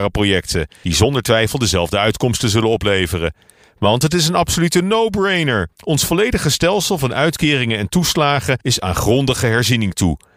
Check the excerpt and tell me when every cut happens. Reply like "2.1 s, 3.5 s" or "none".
none